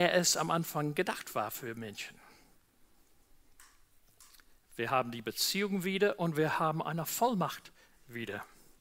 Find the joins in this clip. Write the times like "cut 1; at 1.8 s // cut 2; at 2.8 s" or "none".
none